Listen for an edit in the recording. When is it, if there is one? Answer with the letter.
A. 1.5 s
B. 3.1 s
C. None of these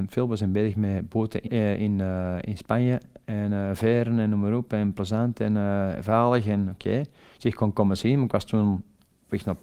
A